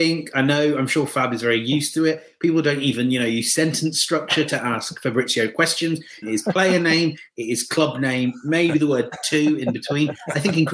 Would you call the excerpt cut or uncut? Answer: cut